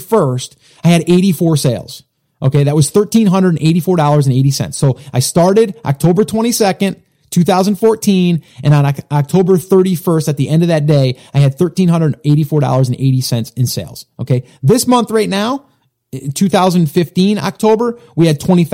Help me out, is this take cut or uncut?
uncut